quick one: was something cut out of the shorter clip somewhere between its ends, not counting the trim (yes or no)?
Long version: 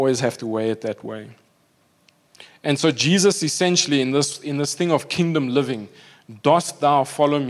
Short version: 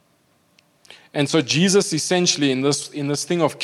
no